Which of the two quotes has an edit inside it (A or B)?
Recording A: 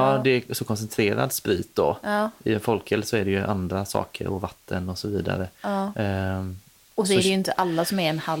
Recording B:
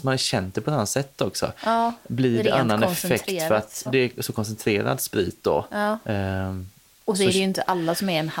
B